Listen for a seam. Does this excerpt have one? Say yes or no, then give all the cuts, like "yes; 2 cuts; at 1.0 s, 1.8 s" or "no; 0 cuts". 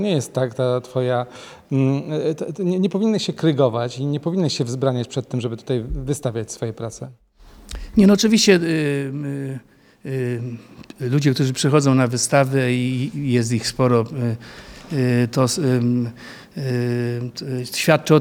no; 0 cuts